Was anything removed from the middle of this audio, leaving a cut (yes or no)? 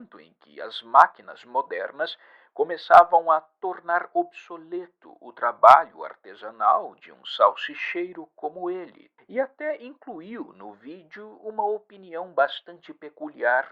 yes